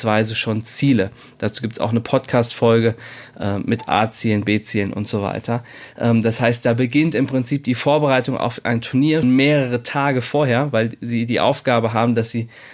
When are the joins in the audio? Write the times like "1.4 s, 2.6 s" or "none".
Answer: 9.2 s